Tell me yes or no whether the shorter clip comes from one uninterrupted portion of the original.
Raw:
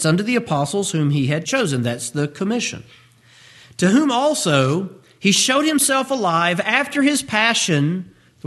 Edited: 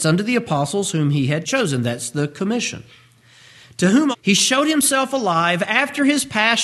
no